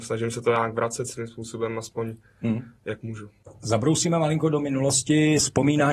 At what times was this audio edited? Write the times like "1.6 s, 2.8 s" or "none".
none